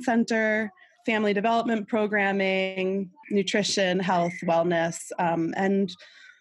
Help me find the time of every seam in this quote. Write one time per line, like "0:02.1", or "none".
0:03.2